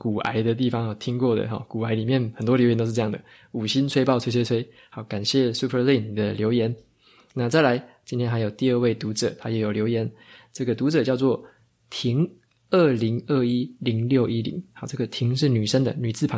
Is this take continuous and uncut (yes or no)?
yes